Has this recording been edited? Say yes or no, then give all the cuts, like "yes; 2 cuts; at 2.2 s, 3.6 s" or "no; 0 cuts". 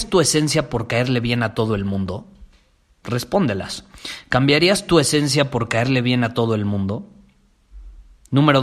no; 0 cuts